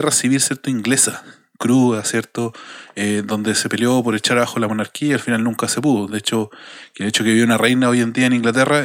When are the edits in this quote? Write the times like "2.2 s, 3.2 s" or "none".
none